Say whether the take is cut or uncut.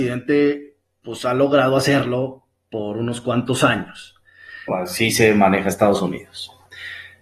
cut